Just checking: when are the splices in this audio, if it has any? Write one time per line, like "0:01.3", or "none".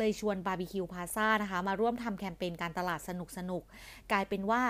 none